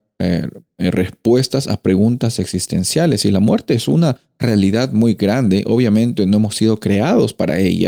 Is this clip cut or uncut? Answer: uncut